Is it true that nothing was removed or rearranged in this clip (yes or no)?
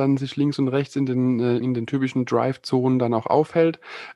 no